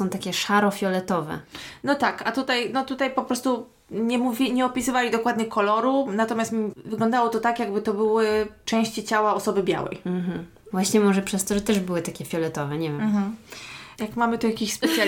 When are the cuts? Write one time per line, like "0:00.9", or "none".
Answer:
0:10.7